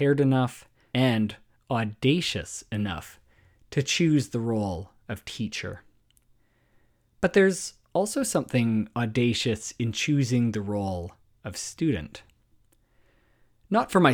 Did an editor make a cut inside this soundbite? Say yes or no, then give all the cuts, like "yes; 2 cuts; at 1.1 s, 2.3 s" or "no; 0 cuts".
yes; 1 cut; at 0.9 s